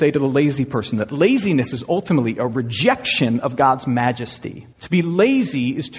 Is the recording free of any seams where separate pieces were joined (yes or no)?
no